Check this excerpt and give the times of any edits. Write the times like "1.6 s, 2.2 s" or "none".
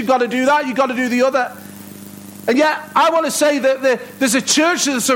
none